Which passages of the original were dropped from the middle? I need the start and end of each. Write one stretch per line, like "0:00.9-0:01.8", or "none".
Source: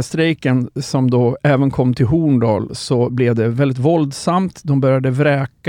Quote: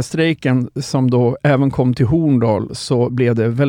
none